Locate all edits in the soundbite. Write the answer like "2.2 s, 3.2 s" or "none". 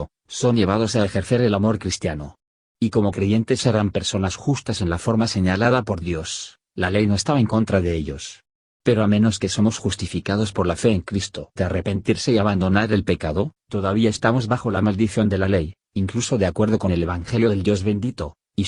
11.6 s